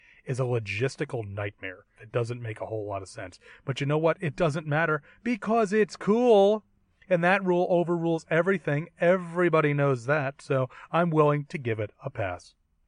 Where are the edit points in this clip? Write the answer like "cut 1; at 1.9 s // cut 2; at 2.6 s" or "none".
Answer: cut 1; at 2.0 s